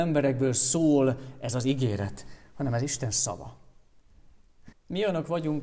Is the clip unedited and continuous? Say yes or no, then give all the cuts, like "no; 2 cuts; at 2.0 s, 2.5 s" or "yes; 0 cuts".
no; 1 cut; at 4.7 s